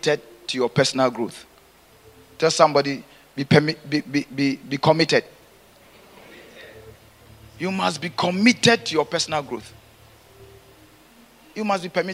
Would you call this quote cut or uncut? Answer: uncut